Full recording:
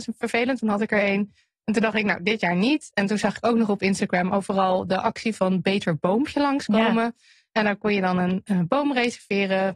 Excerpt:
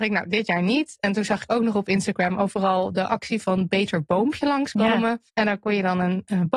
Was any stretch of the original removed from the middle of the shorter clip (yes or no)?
yes